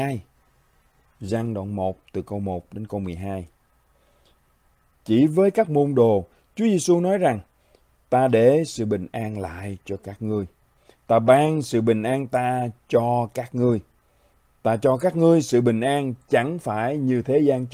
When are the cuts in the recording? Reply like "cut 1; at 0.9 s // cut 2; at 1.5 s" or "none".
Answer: none